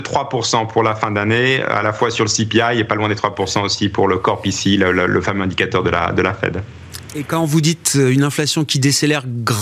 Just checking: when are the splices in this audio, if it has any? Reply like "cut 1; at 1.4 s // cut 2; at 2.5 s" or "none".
cut 1; at 7.1 s